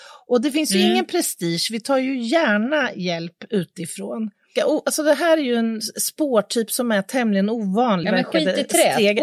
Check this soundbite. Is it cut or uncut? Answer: cut